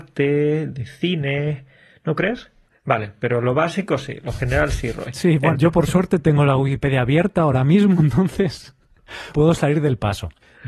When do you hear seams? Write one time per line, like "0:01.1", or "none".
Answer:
0:02.7
0:05.5

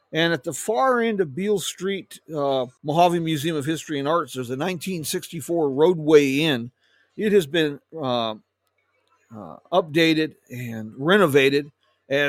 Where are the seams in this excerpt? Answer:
0:02.8

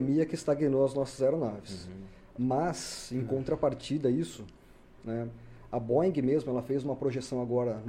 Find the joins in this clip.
none

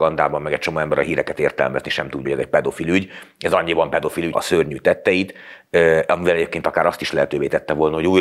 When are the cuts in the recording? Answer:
0:02.2
0:04.3

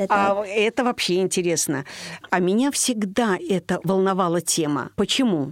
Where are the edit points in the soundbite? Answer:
0:02.2
0:03.8

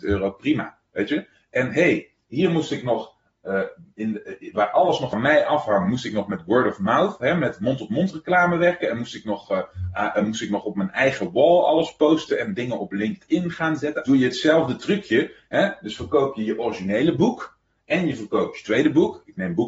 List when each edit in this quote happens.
0:14.0

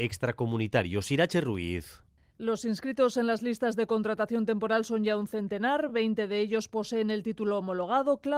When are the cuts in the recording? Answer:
none

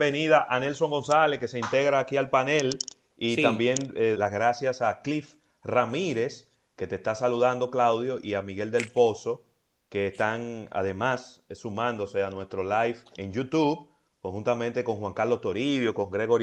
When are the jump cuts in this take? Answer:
0:04.1
0:13.2

